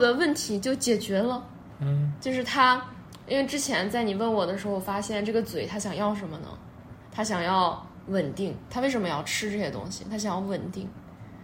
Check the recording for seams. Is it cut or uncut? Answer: uncut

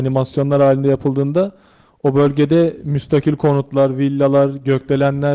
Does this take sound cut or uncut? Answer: uncut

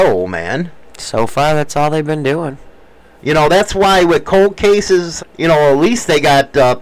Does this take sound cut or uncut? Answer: cut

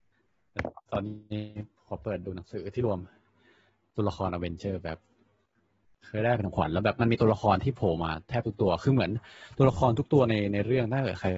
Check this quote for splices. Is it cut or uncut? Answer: uncut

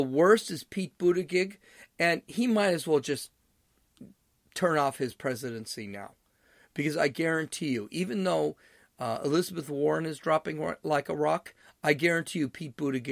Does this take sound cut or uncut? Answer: uncut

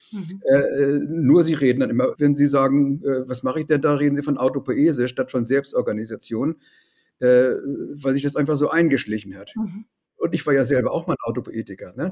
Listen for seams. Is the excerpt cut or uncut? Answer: cut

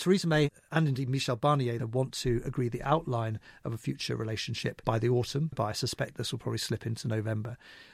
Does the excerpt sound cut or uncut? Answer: cut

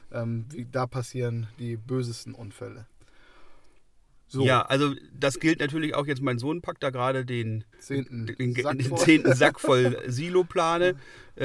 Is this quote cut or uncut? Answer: cut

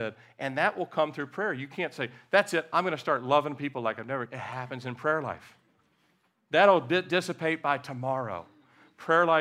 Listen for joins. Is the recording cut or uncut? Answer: uncut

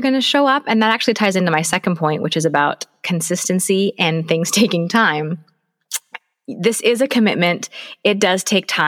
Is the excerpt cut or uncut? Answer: uncut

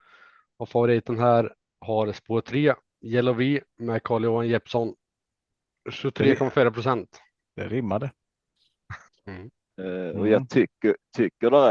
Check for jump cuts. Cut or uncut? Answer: cut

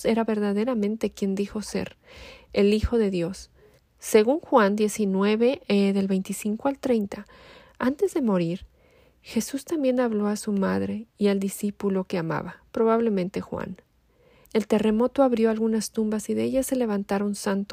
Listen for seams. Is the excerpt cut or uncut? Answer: cut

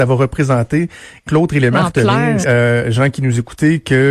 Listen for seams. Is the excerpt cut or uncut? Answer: cut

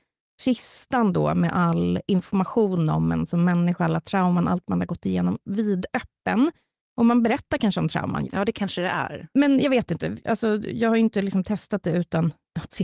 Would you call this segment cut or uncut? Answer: cut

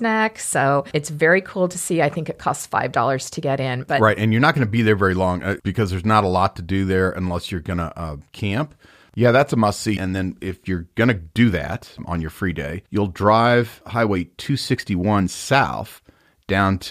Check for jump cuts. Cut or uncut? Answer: cut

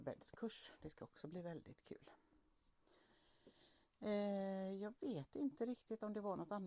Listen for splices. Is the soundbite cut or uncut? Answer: uncut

